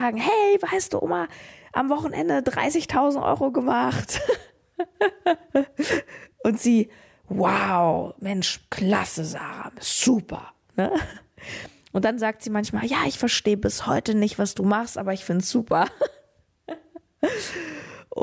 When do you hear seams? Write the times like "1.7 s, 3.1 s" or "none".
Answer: none